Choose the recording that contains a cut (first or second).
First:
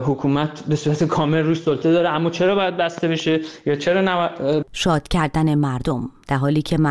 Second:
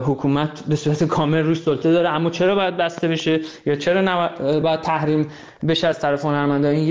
first